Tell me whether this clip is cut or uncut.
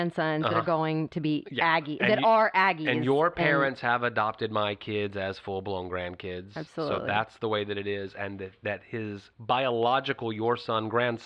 uncut